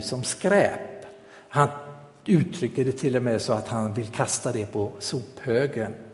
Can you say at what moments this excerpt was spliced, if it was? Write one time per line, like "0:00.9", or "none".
none